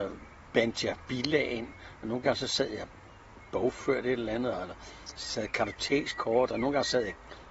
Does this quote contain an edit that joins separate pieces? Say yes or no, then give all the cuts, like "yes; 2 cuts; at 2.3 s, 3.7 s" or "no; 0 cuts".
no; 0 cuts